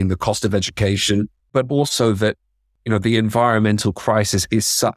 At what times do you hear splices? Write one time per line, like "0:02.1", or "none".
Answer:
0:01.4